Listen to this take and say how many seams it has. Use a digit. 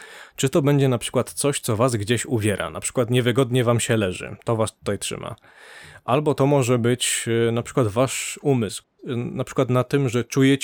1